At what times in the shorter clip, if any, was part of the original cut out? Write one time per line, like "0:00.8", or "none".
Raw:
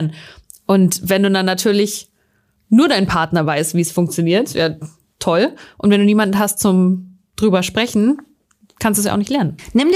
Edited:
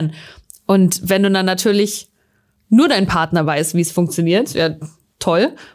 none